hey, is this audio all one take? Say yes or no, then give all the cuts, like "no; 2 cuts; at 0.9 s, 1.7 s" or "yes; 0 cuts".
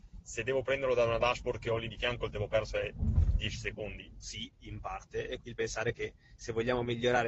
no; 2 cuts; at 4.1 s, 5.4 s